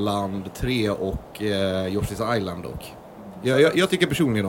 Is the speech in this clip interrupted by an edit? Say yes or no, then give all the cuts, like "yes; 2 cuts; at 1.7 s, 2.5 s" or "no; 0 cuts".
no; 0 cuts